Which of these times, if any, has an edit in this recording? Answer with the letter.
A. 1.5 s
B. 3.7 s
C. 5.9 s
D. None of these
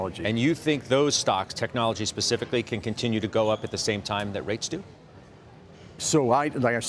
D